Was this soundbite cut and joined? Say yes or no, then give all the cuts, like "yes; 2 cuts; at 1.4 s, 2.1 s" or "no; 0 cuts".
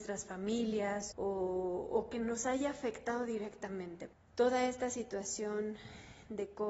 yes; 2 cuts; at 1.1 s, 4.1 s